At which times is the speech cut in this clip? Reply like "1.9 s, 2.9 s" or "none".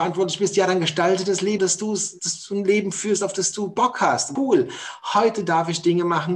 1.6 s, 4.4 s